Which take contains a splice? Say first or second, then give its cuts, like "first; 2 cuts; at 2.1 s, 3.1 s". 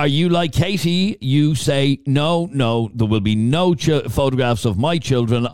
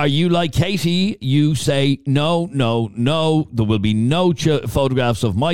first; 1 cut; at 2.9 s